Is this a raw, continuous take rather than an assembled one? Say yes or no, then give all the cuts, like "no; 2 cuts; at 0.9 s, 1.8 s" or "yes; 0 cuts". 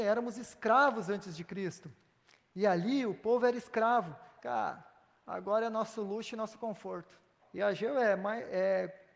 no; 2 cuts; at 4.4 s, 7.4 s